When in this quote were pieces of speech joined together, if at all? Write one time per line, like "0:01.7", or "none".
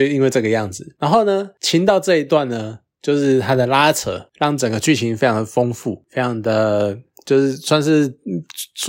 none